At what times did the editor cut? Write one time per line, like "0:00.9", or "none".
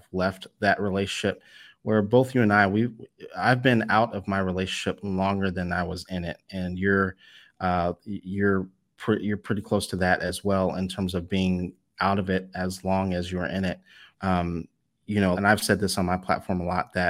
0:14.1
0:15.3